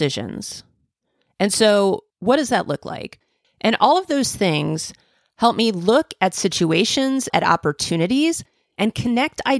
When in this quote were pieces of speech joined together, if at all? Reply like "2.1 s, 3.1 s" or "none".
3.4 s, 7.3 s

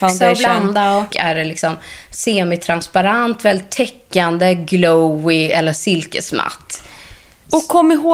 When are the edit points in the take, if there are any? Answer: 1.1 s

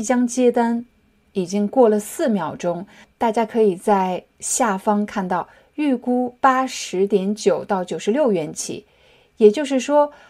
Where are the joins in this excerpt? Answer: 3.1 s

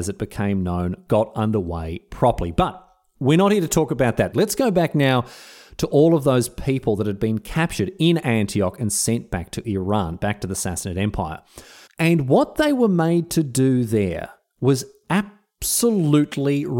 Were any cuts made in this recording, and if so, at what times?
4.3 s, 11.9 s

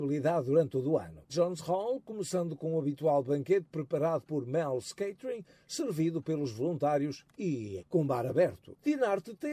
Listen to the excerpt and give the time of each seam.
1.3 s, 7.8 s

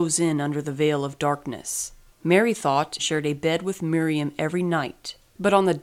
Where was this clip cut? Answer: 3.0 s

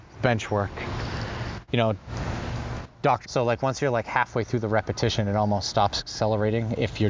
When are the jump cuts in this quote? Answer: 1.7 s, 3.2 s

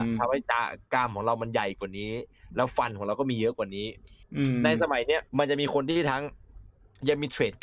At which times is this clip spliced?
5.3 s

